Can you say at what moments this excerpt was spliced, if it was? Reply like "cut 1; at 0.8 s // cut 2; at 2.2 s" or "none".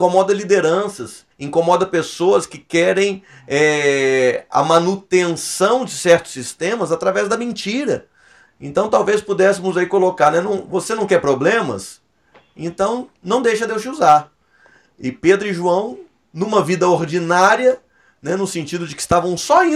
cut 1; at 1.3 s